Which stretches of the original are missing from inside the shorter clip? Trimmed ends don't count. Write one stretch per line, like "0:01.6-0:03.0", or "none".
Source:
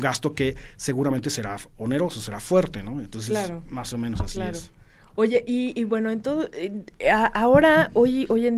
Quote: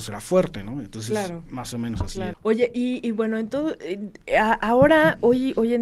0:04.5-0:05.1